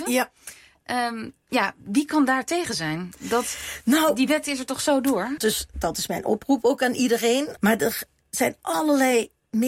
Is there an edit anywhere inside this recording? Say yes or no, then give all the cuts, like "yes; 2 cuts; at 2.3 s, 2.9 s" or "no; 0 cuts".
yes; 2 cuts; at 5.4 s, 7.6 s